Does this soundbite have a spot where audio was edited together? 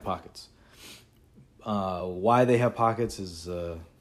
no; 0 cuts

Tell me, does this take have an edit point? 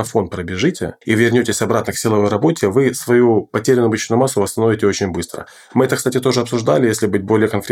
yes; 1 cut; at 1.0 s

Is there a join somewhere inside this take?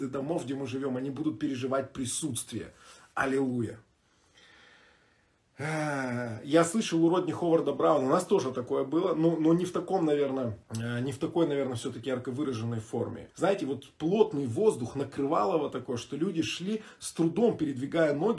yes; 2 cuts; at 10.6 s, 13.3 s

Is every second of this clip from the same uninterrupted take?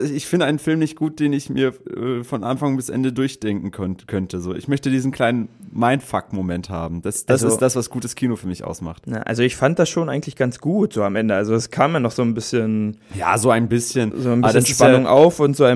yes; 0 cuts

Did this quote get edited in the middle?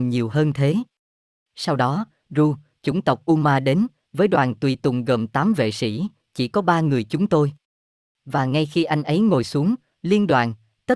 no; 0 cuts

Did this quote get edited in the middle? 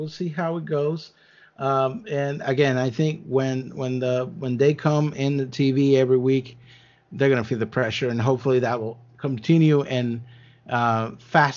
no; 0 cuts

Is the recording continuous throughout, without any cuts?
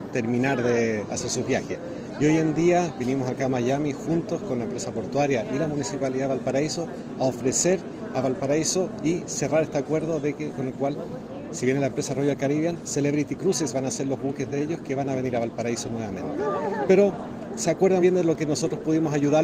no; 2 cuts; at 16.9 s, 18.0 s

